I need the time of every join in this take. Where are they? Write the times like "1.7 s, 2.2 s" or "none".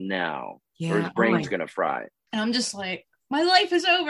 2.3 s